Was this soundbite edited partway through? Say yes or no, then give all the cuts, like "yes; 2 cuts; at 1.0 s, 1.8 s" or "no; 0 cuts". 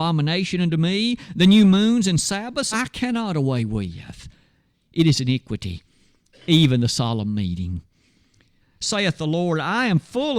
yes; 2 cuts; at 2.7 s, 8.6 s